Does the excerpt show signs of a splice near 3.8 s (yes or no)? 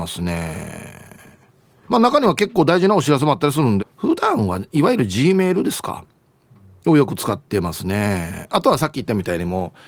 yes